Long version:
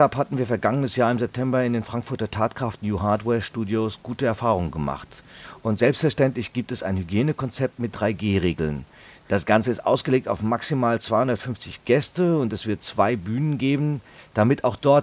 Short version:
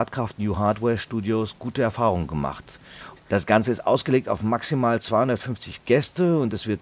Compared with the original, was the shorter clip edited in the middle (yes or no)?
yes